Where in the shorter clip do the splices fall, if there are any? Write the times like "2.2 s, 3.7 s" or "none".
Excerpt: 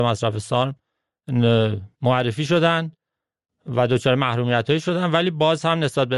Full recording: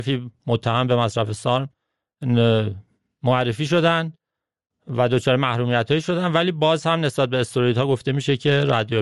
1.9 s